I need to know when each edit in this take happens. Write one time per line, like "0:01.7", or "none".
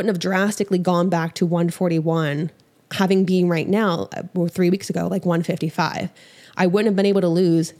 none